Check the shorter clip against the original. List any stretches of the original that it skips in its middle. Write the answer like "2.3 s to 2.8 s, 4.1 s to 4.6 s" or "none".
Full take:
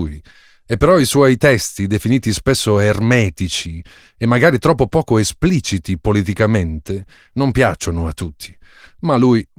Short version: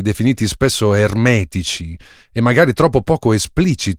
none